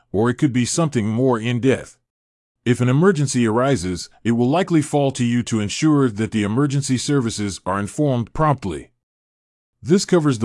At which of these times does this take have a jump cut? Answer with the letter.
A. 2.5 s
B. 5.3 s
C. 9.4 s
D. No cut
A